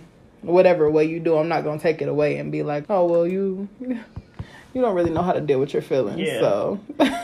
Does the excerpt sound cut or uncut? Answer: cut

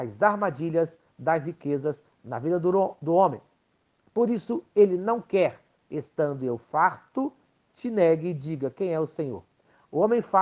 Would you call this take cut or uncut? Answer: uncut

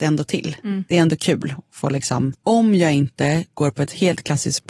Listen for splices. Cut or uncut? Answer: cut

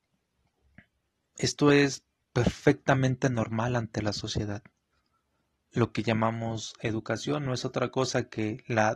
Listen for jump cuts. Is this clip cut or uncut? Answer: uncut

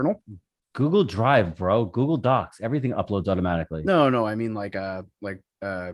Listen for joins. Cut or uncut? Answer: uncut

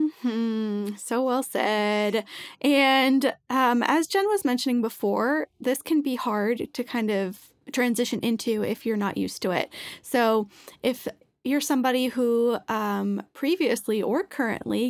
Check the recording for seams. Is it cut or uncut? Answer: uncut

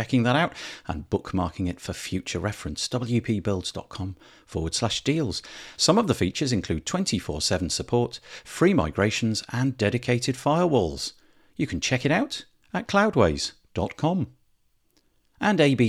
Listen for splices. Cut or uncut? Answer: cut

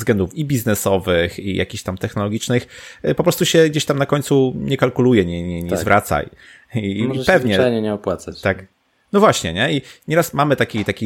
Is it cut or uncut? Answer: uncut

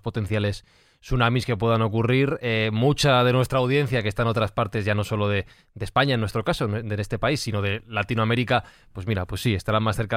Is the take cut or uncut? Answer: uncut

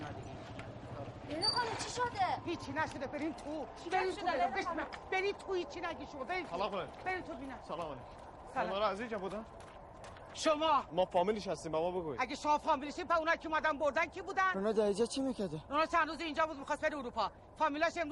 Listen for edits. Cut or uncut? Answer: uncut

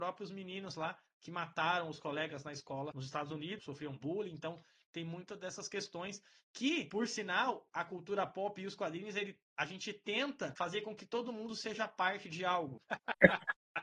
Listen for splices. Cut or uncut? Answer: cut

